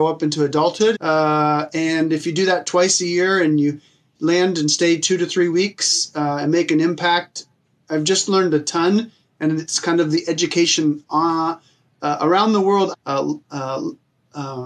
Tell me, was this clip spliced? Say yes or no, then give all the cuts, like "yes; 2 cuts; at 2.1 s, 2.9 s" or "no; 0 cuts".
yes; 2 cuts; at 0.9 s, 12.9 s